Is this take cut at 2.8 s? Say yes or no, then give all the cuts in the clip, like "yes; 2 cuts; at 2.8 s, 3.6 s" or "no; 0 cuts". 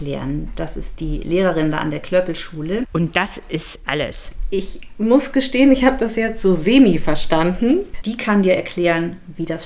yes; 2 cuts; at 2.8 s, 8.0 s